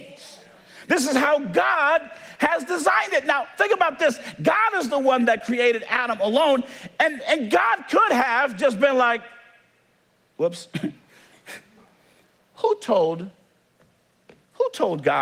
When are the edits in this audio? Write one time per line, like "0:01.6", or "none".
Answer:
none

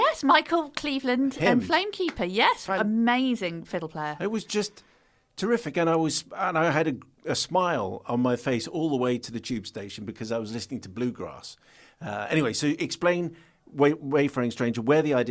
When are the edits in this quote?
none

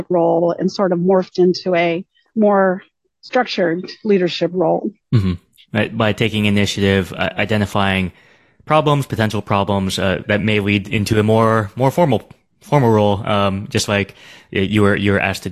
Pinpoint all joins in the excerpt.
0:10.2

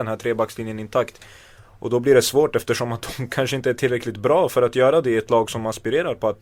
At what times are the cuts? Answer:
none

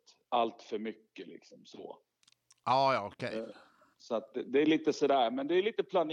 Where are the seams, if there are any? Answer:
0:03.9

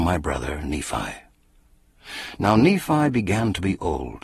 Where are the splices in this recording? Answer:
none

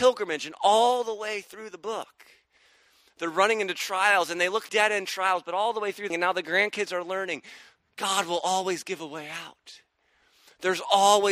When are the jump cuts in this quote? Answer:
0:04.7
0:06.1

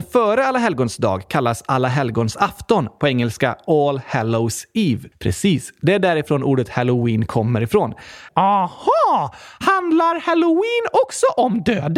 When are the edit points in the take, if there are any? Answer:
0:05.1
0:08.3

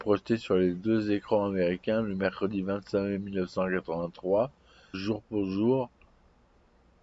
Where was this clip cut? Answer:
0:04.9

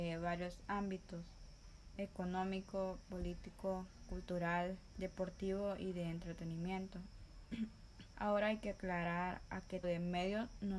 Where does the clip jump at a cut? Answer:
0:08.1
0:09.8

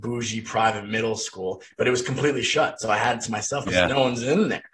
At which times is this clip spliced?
0:03.7

